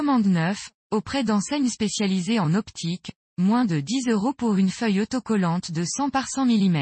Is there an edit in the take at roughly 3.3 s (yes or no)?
yes